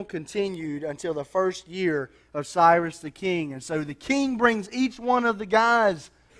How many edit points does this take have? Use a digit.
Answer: 0